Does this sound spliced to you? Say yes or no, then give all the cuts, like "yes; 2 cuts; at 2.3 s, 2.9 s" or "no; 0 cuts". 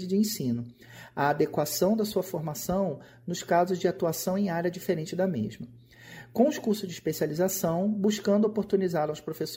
no; 0 cuts